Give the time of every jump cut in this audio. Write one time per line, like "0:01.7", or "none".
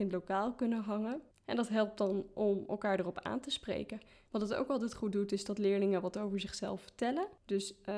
0:04.3